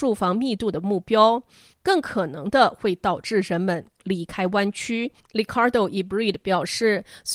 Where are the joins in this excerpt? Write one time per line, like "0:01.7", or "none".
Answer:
none